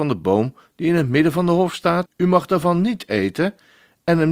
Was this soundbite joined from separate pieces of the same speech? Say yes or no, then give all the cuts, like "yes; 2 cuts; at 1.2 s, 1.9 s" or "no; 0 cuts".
yes; 1 cut; at 2.1 s